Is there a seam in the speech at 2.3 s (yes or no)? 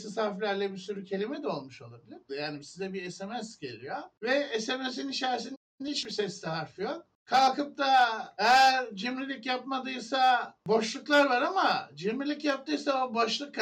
yes